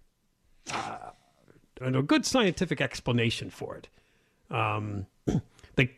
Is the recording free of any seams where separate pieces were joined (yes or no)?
no